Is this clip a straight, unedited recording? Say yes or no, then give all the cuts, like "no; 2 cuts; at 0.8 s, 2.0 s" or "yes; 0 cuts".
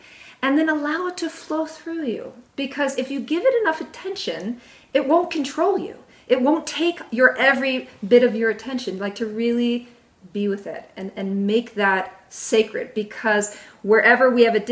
yes; 0 cuts